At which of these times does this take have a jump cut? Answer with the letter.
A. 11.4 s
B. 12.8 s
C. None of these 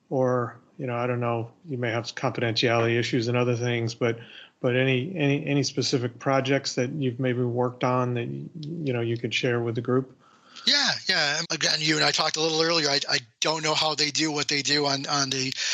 A